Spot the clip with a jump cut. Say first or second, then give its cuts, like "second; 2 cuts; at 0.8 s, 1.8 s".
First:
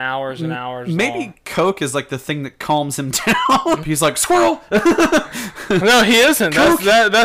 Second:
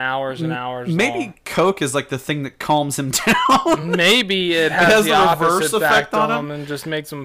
first; 1 cut; at 3.8 s